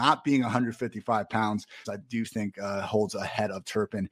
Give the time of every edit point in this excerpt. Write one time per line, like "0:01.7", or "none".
0:01.8